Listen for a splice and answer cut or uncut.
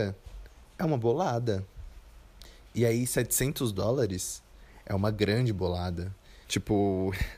cut